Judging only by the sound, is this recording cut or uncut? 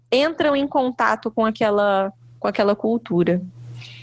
uncut